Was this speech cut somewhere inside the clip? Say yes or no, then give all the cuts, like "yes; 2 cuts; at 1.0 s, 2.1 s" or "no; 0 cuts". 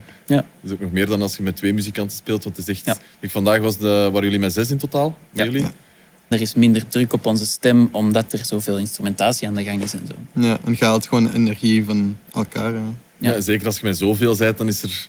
yes; 1 cut; at 6.3 s